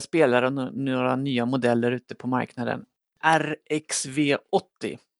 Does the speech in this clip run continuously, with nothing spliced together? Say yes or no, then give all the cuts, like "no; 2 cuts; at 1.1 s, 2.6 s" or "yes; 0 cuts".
no; 1 cut; at 3.2 s